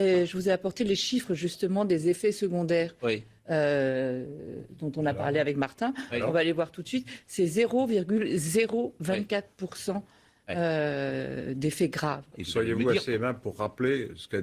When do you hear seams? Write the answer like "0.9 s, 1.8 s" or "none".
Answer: 12.3 s